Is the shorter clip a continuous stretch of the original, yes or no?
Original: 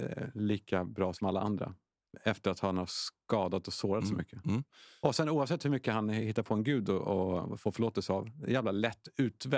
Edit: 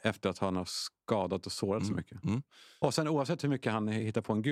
yes